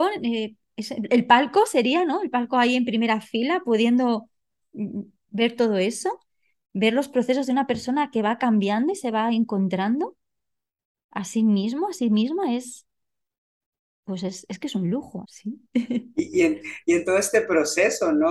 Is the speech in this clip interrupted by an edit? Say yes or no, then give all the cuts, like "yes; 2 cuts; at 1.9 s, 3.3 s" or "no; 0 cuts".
yes; 1 cut; at 15.2 s